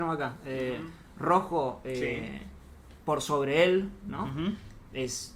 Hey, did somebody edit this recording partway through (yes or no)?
no